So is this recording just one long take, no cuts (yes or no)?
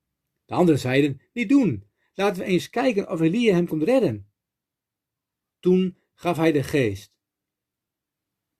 no